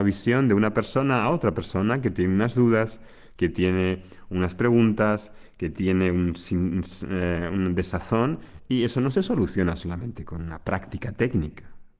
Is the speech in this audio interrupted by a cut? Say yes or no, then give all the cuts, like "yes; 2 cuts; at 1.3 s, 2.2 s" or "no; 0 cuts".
no; 0 cuts